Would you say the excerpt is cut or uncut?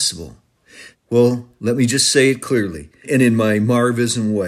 cut